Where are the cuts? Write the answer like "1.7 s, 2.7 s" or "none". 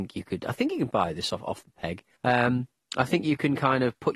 2.1 s